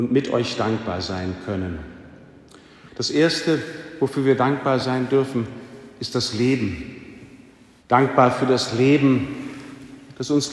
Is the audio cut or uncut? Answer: cut